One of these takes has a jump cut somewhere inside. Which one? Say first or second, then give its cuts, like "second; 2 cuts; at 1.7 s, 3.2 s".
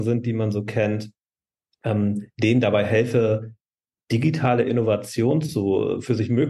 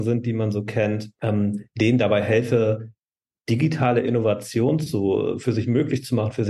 second; 1 cut; at 1.1 s